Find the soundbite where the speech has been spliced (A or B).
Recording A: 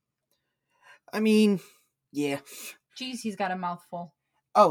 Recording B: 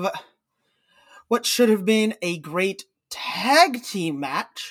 A